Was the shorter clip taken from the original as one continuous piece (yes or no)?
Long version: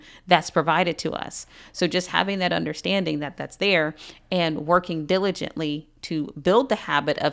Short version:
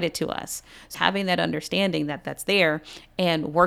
no